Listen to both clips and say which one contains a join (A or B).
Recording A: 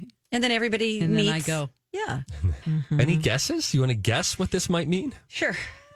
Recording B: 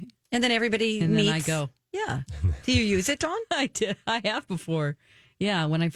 A